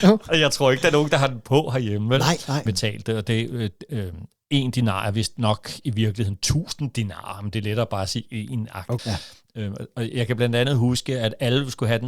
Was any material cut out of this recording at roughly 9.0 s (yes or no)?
yes